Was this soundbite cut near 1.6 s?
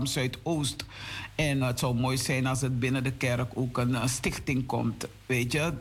yes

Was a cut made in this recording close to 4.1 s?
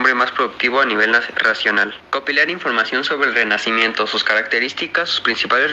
no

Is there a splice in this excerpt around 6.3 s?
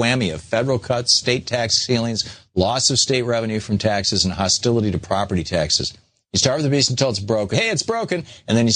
yes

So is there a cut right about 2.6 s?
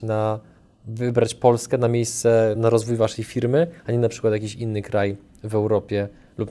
yes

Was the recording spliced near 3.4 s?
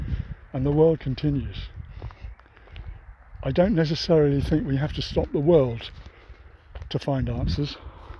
no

